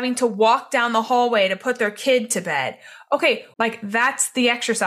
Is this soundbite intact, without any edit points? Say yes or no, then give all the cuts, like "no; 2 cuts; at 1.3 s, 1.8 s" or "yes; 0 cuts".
no; 1 cut; at 3.5 s